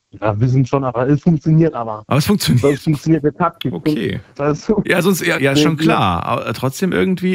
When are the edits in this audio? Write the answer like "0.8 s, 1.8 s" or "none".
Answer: 4.3 s, 5.3 s